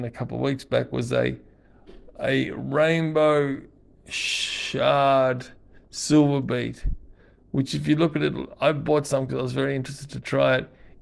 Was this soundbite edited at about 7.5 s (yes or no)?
no